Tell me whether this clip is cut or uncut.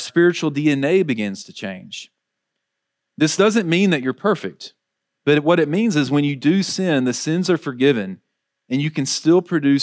uncut